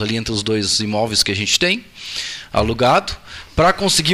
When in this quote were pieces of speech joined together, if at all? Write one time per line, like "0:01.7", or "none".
none